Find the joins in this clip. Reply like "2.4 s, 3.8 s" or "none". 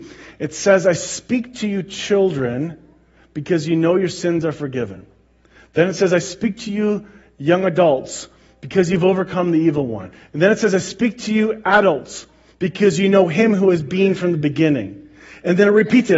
none